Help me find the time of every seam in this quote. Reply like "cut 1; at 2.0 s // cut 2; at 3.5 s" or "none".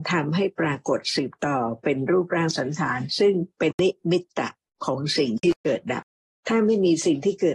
cut 1; at 3.7 s